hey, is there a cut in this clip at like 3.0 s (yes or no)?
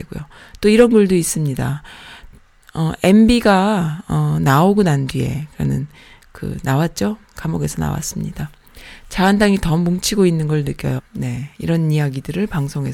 no